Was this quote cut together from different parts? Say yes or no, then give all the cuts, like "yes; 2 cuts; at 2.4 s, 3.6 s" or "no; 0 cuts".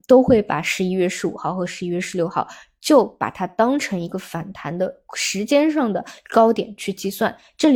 no; 0 cuts